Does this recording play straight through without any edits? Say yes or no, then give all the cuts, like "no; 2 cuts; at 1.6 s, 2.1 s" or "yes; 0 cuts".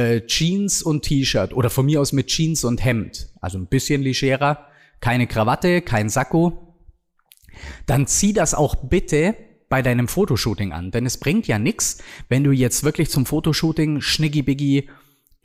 yes; 0 cuts